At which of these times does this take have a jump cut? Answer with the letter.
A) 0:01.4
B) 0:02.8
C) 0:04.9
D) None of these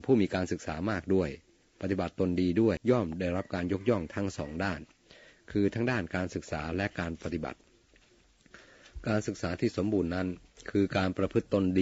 B